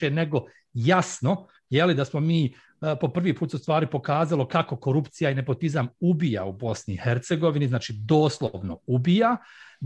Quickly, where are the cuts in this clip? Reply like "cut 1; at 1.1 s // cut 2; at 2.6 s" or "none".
none